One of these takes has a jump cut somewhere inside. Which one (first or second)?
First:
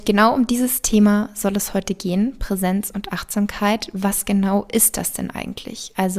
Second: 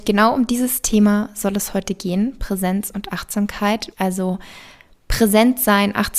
second